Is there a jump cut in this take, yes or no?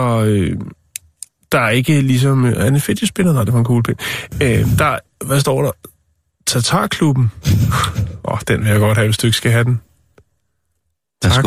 no